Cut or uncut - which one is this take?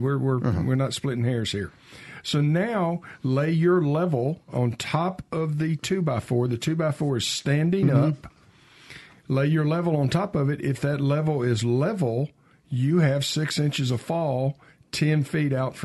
uncut